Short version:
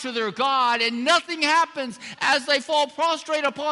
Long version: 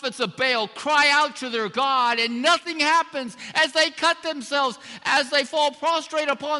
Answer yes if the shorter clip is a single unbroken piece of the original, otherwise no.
no